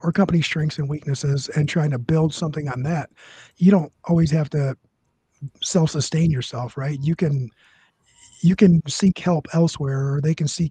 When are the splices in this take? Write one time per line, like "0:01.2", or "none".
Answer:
none

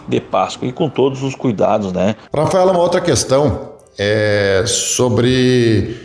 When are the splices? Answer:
0:02.3

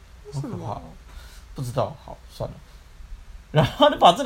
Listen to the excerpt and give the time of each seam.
0:03.0

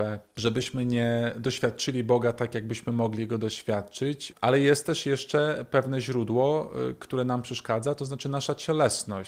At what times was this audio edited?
0:04.3

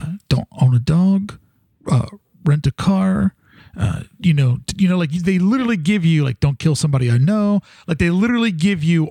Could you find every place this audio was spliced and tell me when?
none

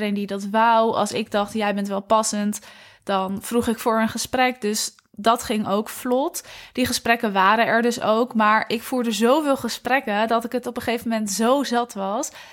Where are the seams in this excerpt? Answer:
none

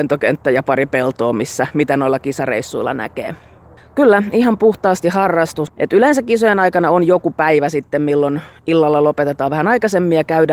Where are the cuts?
0:03.8
0:05.7

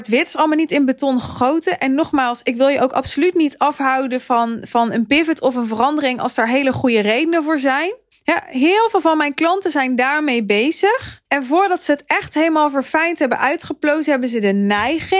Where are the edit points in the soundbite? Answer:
0:08.1
0:11.3

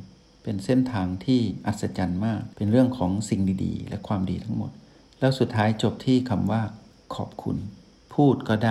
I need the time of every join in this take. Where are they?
0:02.5

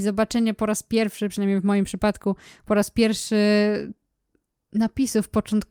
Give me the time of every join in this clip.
none

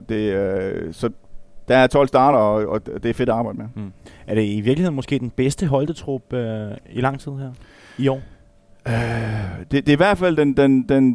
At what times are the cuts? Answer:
none

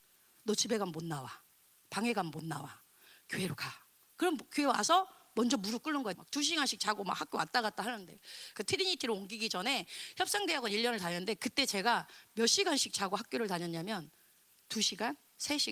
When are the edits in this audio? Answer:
0:06.1
0:08.5

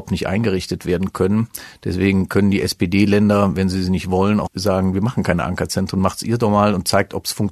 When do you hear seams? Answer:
0:04.5

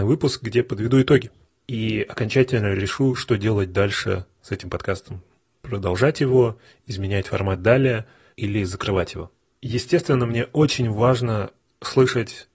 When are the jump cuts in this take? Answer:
none

